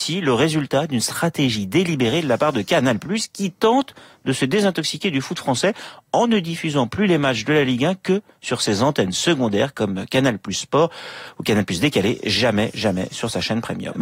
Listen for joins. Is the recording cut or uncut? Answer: uncut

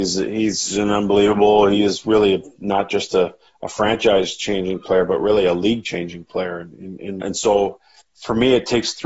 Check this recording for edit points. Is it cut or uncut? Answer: cut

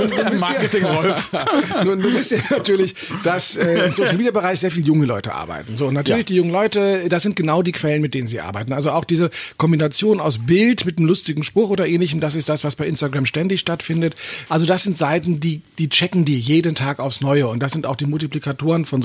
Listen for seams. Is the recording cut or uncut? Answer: cut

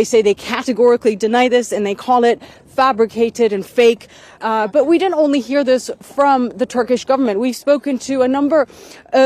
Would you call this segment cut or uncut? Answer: cut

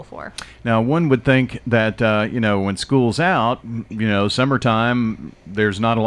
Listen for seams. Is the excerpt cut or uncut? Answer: uncut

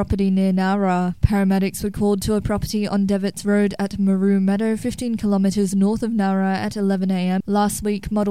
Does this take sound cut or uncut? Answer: cut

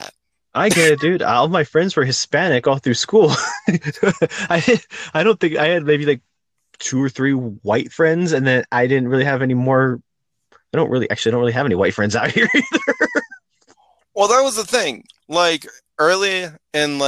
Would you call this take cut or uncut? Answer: uncut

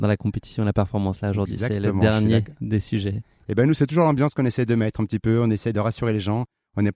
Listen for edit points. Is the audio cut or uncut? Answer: uncut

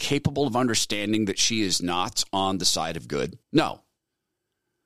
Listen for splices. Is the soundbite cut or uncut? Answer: cut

